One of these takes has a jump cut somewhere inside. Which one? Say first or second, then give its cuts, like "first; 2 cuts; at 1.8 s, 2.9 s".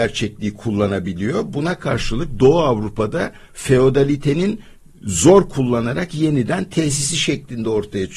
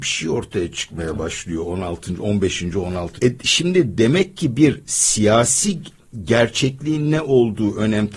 second; 1 cut; at 3.2 s